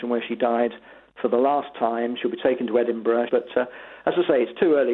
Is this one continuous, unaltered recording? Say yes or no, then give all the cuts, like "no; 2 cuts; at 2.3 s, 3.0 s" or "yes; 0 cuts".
no; 1 cut; at 3.3 s